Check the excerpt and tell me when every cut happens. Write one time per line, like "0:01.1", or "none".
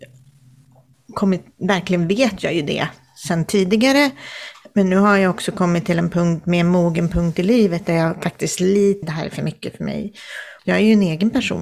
0:09.0
0:10.6